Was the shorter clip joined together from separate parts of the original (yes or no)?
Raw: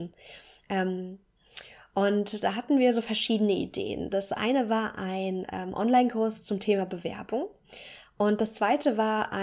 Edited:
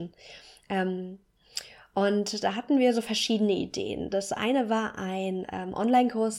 no